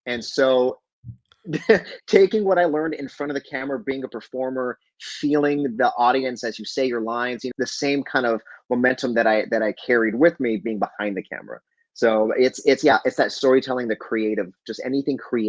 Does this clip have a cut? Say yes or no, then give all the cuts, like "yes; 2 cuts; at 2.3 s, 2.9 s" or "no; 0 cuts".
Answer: yes; 1 cut; at 7.5 s